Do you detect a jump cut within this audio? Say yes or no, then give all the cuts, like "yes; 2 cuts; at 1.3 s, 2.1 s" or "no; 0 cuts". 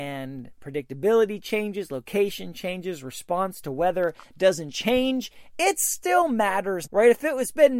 yes; 2 cuts; at 5.5 s, 6.9 s